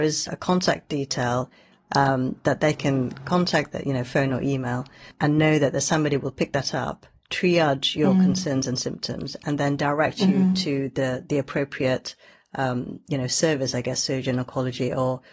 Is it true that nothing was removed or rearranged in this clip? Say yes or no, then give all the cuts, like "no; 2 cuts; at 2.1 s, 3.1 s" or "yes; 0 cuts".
yes; 0 cuts